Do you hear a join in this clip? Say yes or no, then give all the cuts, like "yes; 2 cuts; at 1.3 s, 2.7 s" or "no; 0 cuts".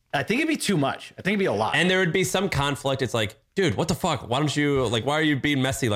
no; 0 cuts